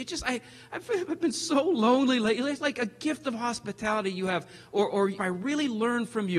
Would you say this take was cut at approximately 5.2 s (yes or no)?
yes